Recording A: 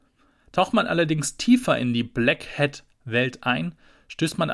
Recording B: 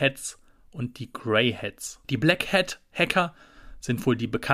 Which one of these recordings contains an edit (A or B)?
B